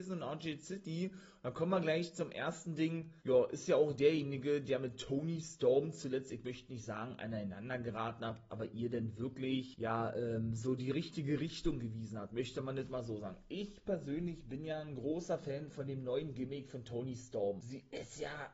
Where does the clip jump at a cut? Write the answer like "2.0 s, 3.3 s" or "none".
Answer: 8.5 s